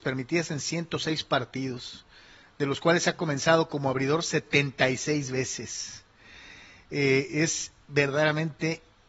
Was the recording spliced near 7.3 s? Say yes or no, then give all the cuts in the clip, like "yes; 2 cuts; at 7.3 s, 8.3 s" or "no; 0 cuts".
yes; 1 cut; at 7.3 s